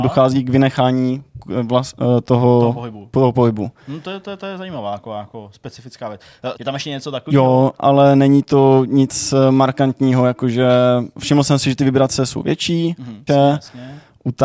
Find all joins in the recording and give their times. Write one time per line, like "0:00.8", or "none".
0:06.5
0:07.8
0:13.3